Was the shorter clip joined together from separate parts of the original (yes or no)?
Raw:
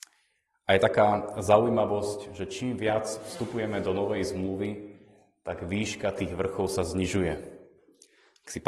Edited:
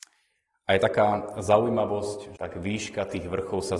yes